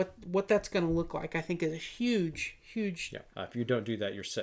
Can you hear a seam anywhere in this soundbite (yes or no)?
yes